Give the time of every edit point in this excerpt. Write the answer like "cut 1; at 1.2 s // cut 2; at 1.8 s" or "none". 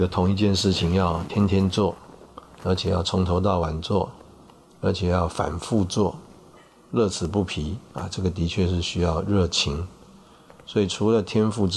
none